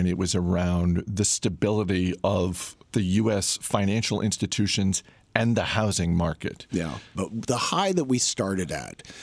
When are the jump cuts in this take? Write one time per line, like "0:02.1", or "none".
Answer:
0:02.8
0:07.2